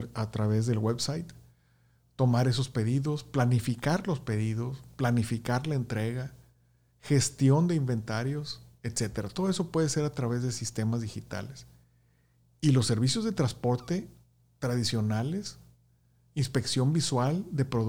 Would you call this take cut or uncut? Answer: uncut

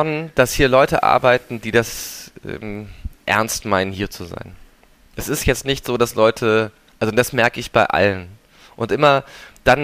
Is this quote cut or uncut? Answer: uncut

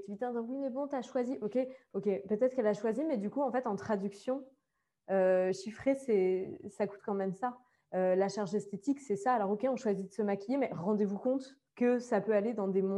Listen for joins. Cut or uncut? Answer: cut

